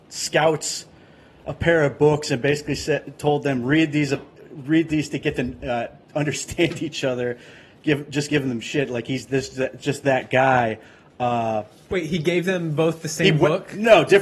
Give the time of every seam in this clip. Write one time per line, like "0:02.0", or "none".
none